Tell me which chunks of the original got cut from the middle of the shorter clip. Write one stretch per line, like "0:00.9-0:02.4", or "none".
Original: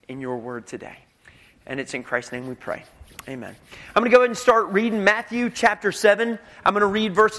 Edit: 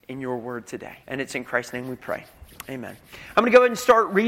0:01.0-0:01.6